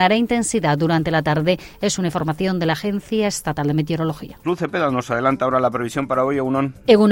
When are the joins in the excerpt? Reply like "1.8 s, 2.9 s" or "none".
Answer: 4.4 s